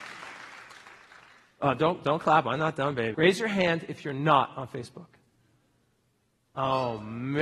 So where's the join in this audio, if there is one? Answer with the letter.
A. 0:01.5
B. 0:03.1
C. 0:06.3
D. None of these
B